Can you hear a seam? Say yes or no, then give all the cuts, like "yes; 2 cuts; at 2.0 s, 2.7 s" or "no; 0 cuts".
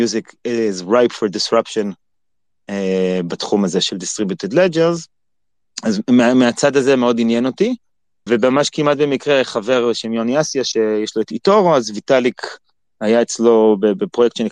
yes; 1 cut; at 8.3 s